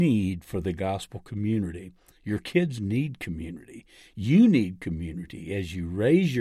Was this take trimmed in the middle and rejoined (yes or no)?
no